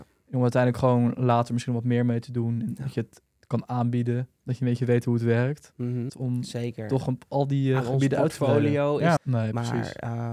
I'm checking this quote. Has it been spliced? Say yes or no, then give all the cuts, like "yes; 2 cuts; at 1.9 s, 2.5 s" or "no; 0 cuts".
yes; 2 cuts; at 6.1 s, 9.2 s